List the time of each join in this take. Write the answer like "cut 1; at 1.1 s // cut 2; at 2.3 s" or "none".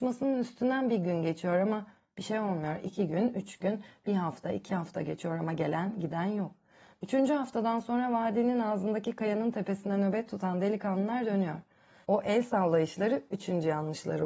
cut 1; at 12.0 s